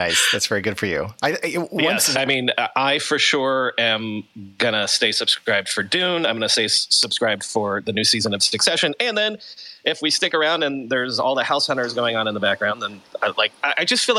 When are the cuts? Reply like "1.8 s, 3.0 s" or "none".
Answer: 2.1 s